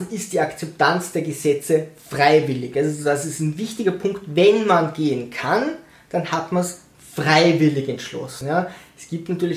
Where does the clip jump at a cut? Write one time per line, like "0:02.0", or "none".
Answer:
none